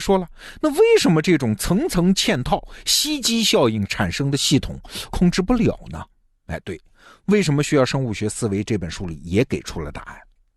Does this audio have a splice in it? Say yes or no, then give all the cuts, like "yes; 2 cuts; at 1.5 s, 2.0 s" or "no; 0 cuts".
yes; 1 cut; at 5.1 s